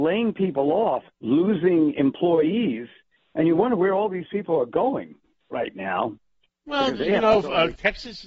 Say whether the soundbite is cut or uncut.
uncut